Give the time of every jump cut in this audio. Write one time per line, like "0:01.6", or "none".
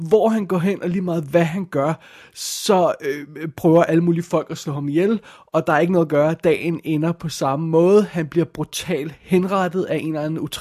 none